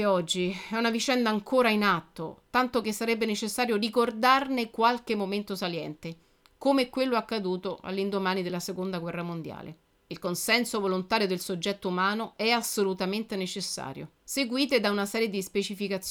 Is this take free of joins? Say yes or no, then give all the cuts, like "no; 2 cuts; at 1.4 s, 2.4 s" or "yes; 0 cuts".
no; 2 cuts; at 9.9 s, 14.2 s